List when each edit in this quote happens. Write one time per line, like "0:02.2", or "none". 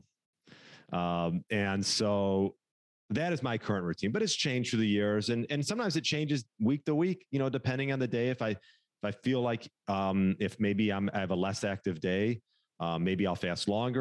none